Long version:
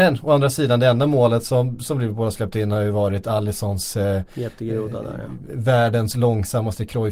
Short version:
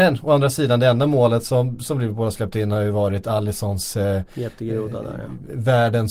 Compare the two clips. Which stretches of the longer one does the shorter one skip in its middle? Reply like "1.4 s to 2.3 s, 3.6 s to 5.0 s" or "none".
none